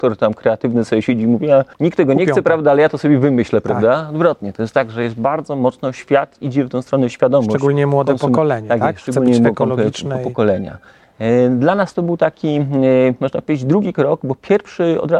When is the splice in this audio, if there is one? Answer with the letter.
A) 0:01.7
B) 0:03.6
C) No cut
A